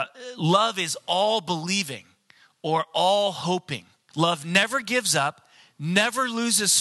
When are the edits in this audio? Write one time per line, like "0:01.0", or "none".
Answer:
0:04.1